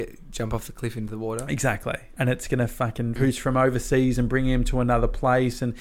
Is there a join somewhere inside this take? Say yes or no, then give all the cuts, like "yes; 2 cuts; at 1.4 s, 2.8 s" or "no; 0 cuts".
yes; 2 cuts; at 2.2 s, 3.2 s